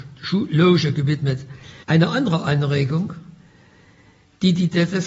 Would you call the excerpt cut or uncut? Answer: cut